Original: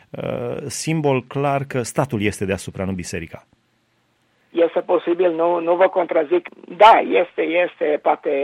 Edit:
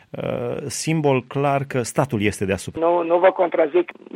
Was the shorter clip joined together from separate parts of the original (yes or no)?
yes